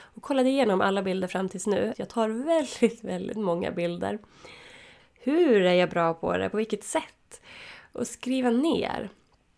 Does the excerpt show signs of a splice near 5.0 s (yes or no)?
yes